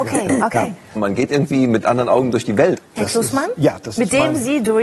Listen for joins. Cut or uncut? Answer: cut